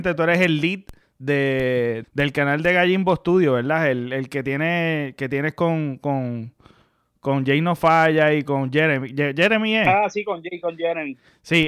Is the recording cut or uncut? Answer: cut